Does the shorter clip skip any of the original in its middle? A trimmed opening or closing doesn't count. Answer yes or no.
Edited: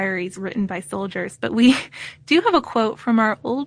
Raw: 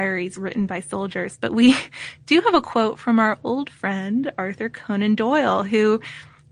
no